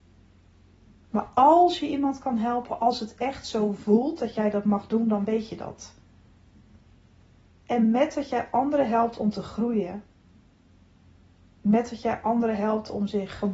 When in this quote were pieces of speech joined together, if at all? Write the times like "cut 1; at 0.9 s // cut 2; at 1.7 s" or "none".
none